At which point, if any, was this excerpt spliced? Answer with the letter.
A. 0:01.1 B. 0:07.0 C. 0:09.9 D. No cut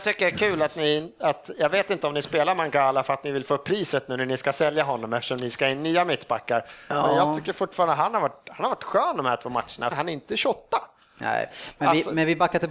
C